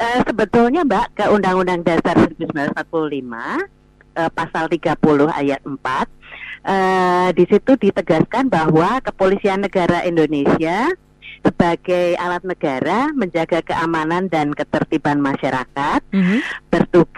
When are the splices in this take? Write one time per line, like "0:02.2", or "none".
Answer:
0:01.1
0:11.4